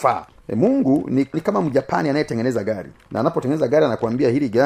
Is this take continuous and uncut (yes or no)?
yes